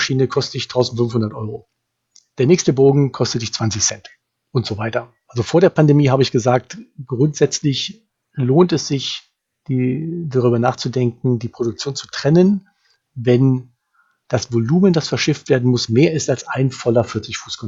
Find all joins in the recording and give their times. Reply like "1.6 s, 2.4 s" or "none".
5.2 s